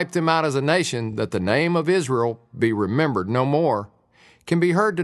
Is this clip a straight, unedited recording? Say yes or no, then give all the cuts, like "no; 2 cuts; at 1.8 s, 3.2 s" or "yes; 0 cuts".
yes; 0 cuts